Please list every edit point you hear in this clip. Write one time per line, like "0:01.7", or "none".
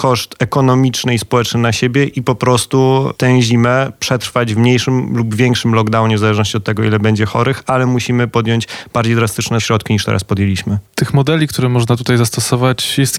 none